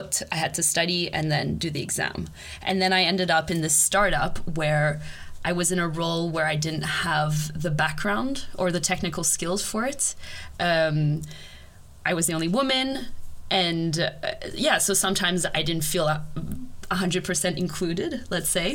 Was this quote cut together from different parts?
no; 0 cuts

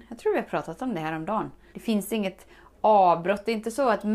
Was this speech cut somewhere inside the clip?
yes; 1 cut; at 1.7 s

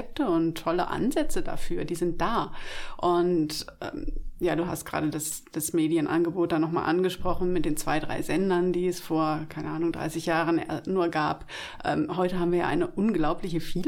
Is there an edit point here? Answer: no; 0 cuts

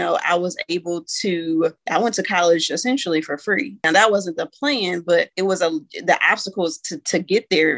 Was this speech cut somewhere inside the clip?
no; 0 cuts

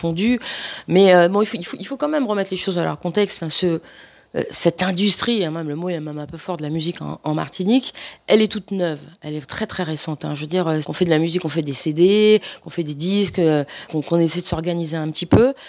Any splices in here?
yes; 3 cuts; at 9.4 s, 10.8 s, 13.9 s

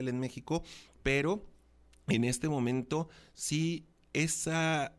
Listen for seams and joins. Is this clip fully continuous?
yes; 0 cuts

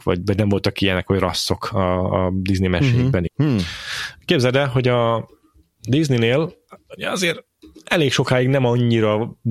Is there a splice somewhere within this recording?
yes; 1 cut; at 3.3 s

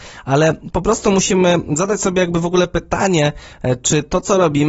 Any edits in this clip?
no; 0 cuts

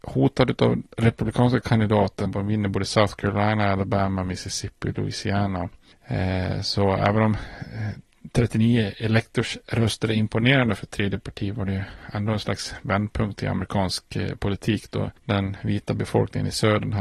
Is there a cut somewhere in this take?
yes; 1 cut; at 2.3 s

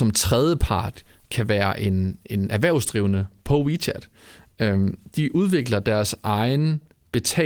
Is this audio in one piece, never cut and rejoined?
yes; 0 cuts

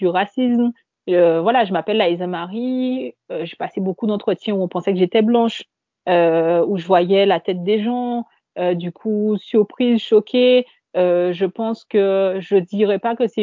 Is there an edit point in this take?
no; 0 cuts

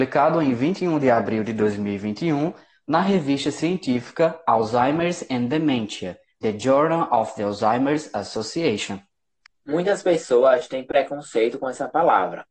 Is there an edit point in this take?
no; 0 cuts

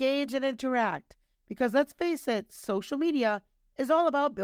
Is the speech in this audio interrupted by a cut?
no; 0 cuts

